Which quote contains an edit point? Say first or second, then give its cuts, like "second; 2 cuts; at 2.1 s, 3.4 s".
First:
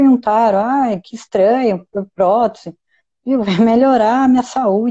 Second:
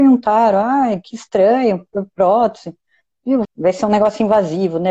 second; 1 cut; at 3.5 s